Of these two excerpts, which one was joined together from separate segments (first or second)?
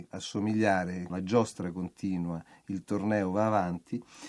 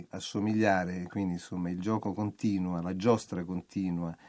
first